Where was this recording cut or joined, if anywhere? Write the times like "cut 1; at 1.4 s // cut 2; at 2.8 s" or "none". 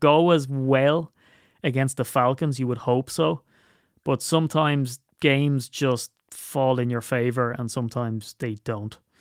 none